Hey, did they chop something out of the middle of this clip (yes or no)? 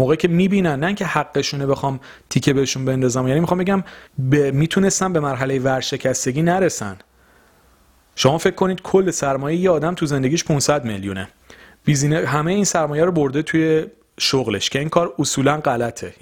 yes